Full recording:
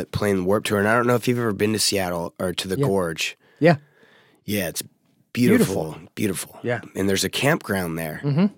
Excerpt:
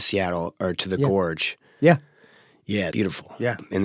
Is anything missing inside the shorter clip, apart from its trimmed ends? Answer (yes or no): yes